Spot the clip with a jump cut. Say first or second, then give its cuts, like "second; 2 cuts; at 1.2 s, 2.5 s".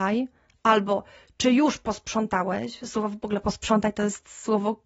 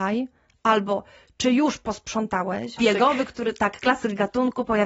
second; 1 cut; at 2.8 s